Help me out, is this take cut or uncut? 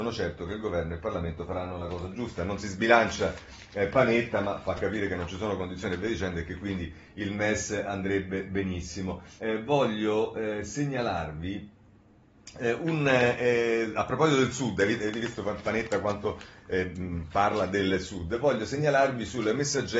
cut